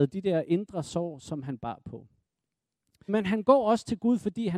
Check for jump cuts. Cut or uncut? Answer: cut